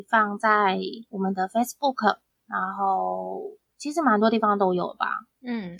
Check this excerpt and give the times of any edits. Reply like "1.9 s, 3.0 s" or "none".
none

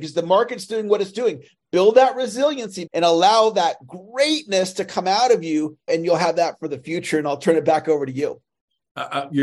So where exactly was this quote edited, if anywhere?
2.9 s, 5.9 s

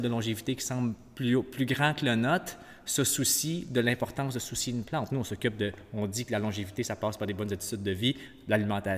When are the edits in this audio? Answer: none

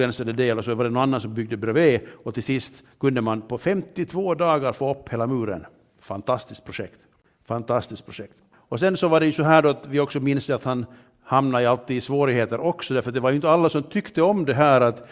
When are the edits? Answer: 8.5 s

